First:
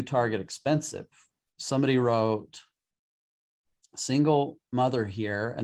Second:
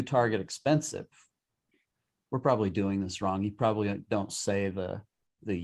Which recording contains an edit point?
first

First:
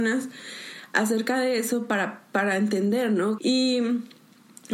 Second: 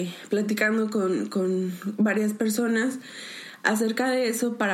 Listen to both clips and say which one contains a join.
first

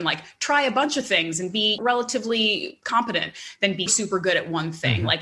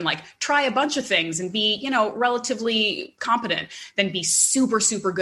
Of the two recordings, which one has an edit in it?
first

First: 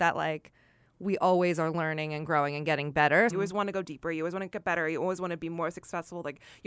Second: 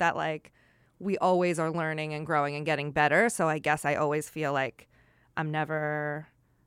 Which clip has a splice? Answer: first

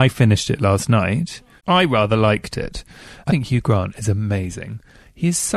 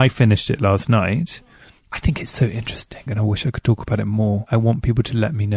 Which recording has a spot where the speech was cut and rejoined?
first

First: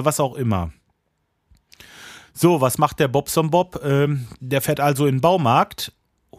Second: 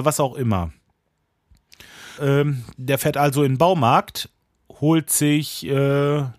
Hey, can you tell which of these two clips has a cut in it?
second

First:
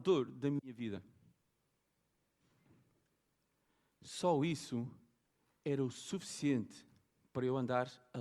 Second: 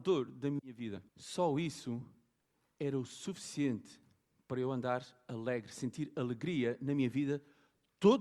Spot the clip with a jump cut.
second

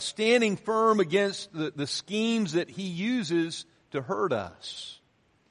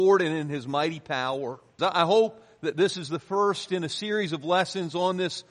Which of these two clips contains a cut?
second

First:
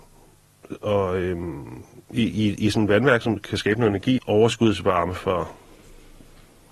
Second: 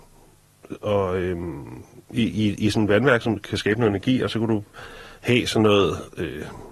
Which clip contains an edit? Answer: first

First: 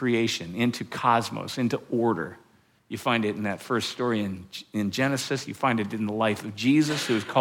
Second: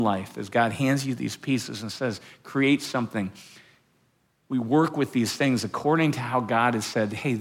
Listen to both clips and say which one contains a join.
first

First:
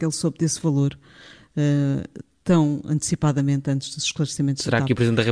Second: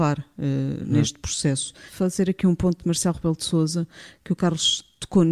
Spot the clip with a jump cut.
second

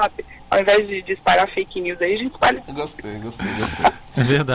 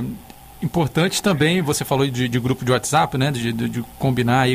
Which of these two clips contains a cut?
first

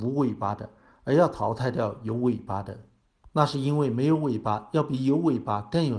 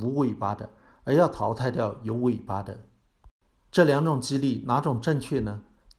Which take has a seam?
first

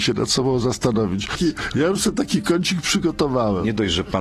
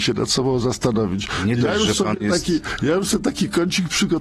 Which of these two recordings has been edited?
first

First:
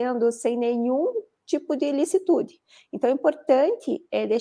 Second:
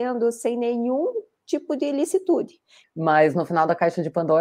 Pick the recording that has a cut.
second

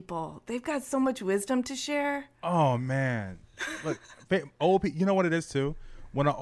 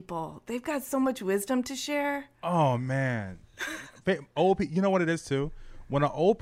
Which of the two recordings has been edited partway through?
second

